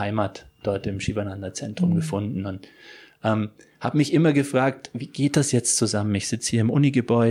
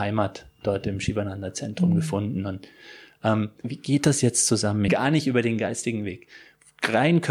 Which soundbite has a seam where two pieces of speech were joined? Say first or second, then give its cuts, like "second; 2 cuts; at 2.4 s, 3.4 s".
second; 2 cuts; at 3.6 s, 4.9 s